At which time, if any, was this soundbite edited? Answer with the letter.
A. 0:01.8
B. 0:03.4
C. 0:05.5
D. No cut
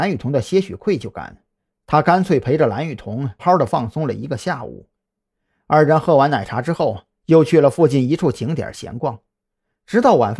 B